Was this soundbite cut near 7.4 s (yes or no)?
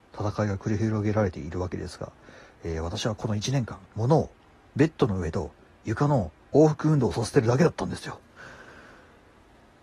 no